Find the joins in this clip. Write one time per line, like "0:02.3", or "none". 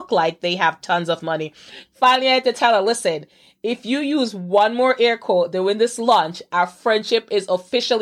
0:01.8

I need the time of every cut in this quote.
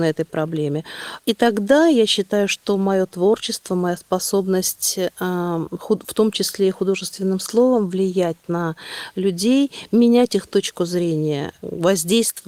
0:01.2

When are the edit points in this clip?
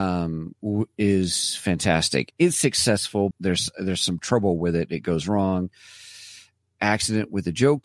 0:02.3
0:03.3

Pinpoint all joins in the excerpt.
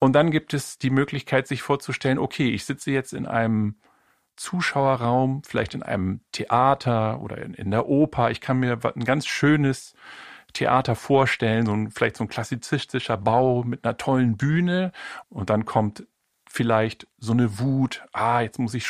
0:15.2

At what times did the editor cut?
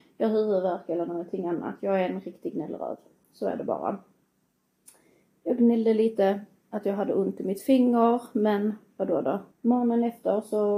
0:09.5

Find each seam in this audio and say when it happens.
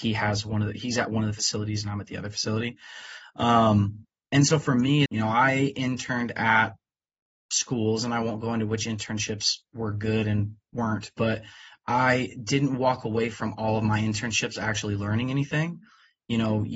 0:05.1

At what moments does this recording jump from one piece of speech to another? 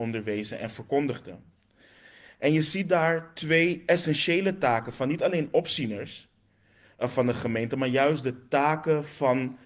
none

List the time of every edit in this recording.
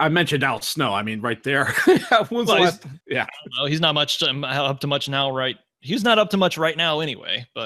0:03.0

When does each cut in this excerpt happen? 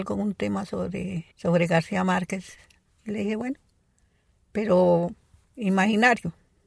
0:01.3

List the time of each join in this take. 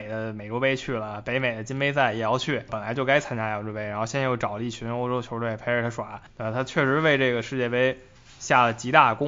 0:02.7

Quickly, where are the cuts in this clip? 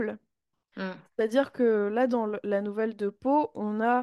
none

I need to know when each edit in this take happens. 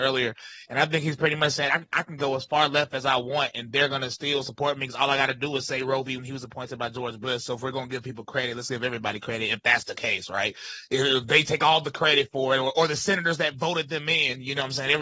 0:06.2

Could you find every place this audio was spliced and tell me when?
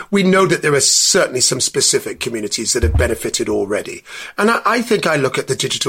none

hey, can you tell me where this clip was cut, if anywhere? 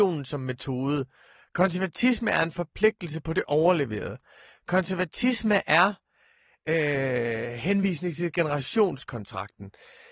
none

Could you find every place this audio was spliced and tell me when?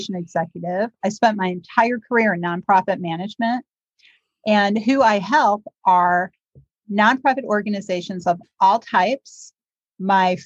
none

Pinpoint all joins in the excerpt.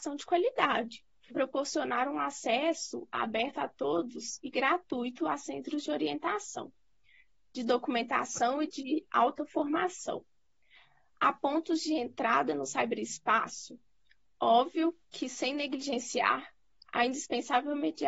0:01.3

